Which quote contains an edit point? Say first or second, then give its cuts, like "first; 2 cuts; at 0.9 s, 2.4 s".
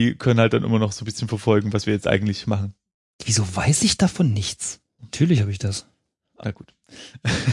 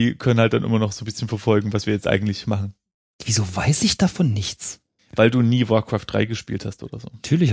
first; 2 cuts; at 5.0 s, 6.4 s